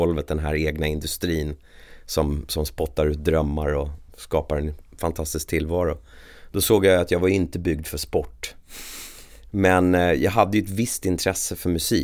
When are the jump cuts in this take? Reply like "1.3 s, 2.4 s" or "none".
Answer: none